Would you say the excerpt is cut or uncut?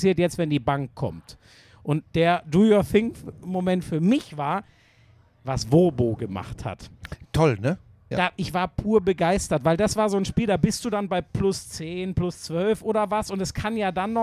cut